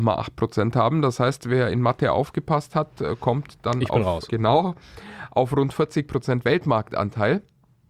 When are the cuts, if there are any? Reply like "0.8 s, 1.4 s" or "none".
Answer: 4.3 s